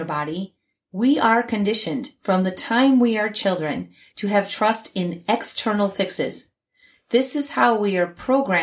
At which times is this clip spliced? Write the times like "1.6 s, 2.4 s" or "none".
none